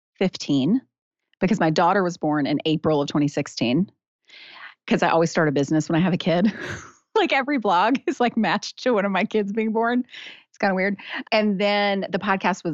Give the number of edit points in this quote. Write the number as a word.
zero